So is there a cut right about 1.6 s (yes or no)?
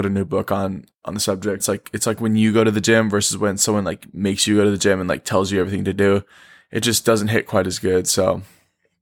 yes